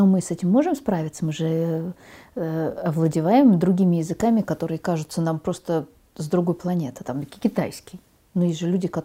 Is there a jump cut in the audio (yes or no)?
no